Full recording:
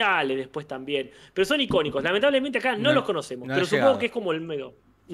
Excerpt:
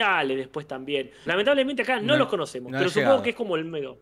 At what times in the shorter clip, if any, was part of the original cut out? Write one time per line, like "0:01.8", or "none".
0:01.3